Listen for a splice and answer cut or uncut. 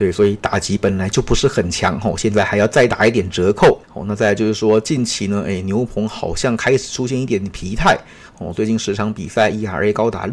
cut